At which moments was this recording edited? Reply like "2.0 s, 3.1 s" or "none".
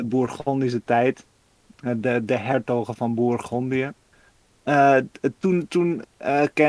none